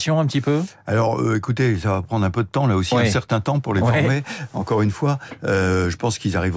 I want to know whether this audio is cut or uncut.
uncut